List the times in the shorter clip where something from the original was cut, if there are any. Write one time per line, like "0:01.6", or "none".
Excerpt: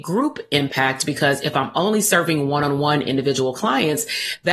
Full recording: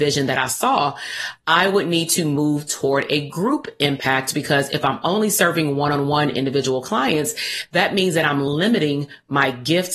none